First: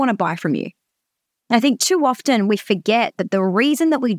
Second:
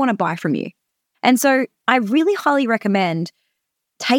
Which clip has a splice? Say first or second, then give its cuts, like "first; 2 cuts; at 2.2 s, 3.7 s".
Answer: second; 1 cut; at 1.1 s